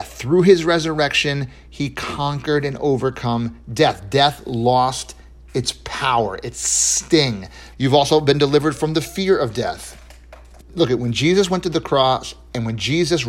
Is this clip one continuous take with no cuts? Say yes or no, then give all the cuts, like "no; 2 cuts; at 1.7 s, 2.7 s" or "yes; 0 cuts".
no; 2 cuts; at 7.7 s, 10.6 s